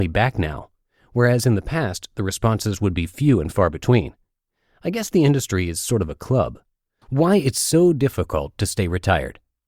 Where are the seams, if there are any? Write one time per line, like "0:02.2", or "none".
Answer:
0:07.0